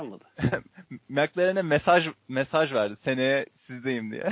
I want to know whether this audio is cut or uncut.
uncut